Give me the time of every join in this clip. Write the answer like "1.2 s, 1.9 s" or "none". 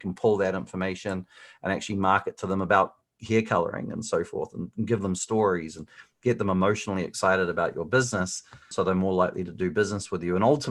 8.7 s